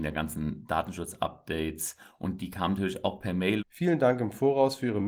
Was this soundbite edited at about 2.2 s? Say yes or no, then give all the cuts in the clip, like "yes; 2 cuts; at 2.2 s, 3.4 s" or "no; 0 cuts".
no; 1 cut; at 3.6 s